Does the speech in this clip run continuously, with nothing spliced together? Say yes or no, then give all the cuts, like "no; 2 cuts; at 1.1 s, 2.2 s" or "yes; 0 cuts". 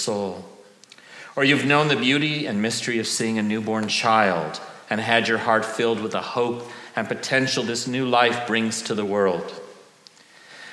yes; 0 cuts